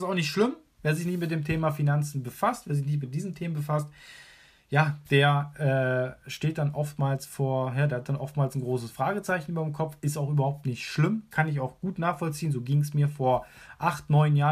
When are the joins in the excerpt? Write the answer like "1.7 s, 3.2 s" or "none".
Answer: none